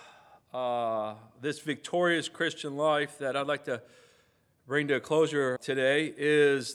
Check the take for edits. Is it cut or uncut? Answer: cut